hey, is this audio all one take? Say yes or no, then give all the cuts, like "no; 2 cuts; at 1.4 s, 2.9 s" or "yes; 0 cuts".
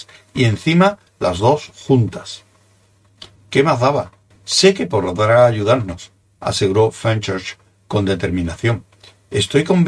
no; 1 cut; at 4.3 s